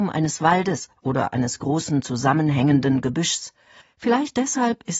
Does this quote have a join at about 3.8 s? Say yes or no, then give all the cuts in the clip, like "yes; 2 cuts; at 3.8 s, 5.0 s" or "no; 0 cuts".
yes; 1 cut; at 3.8 s